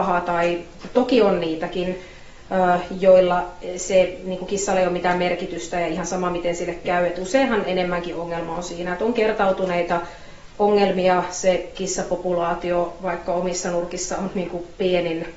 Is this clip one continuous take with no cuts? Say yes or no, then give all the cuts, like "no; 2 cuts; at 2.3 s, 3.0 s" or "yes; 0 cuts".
yes; 0 cuts